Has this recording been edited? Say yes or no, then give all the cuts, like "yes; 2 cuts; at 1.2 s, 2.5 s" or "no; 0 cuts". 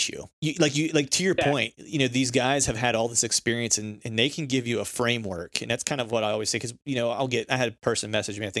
no; 0 cuts